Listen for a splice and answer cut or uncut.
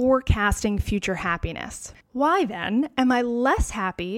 cut